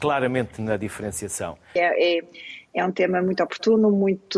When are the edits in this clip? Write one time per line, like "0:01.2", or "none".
0:01.8